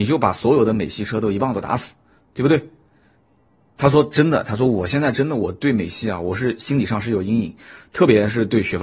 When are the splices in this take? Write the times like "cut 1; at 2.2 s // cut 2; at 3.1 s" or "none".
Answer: none